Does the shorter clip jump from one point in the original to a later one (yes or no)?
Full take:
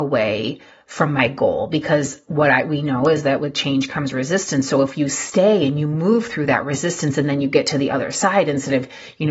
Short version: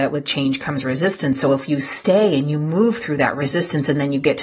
no